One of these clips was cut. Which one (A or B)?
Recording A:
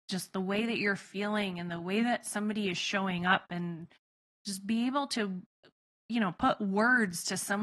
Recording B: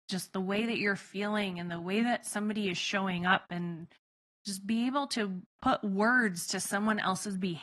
B